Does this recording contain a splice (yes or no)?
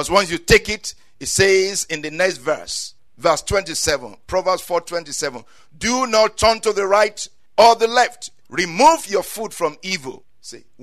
no